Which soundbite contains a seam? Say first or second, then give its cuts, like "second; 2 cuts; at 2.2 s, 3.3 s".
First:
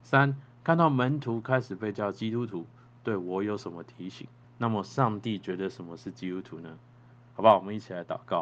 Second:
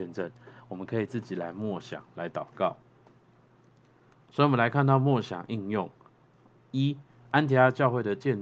first; 1 cut; at 4.4 s